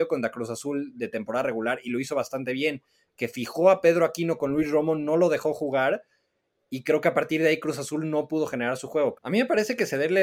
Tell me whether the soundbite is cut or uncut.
cut